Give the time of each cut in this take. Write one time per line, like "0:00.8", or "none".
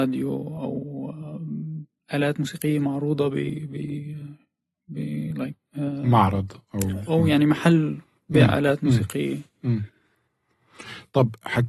0:07.1

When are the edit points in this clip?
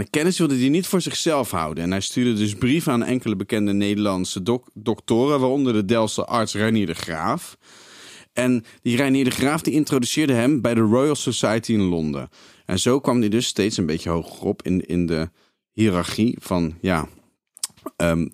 none

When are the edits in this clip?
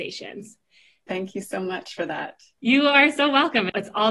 0:01.1

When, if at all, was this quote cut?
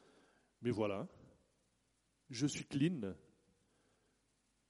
none

